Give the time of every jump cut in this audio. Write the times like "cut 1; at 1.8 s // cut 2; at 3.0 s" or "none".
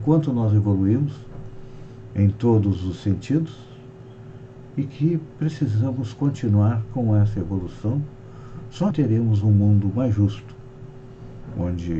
cut 1; at 8.9 s